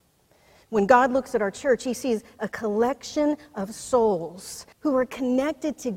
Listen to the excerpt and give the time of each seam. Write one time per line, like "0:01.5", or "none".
0:04.7